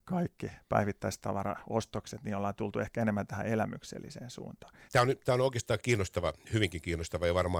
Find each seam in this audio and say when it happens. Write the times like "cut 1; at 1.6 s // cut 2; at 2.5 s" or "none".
cut 1; at 4.9 s